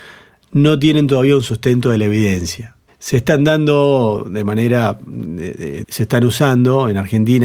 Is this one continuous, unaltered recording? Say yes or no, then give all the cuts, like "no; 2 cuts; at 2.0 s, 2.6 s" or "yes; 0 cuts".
no; 2 cuts; at 2.9 s, 5.8 s